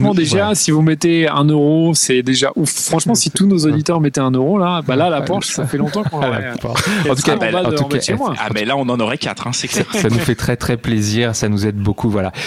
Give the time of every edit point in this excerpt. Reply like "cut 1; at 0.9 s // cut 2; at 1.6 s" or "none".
none